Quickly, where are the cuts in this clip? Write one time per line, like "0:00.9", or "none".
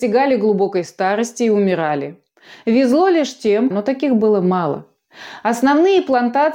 0:03.7